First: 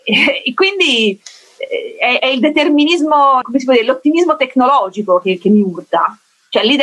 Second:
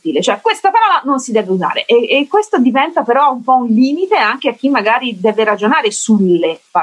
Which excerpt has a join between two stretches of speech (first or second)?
first